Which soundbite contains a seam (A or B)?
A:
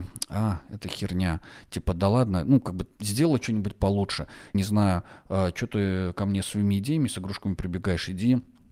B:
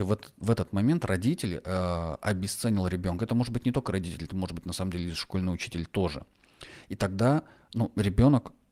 A